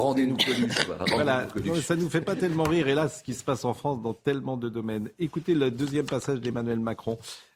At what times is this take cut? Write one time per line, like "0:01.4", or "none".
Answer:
none